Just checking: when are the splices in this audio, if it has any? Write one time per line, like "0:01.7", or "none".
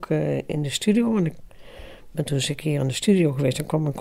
none